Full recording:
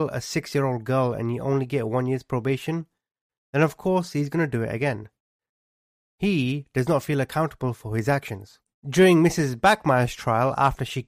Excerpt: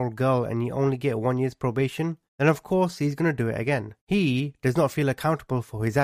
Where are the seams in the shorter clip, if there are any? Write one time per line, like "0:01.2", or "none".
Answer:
0:02.3
0:04.0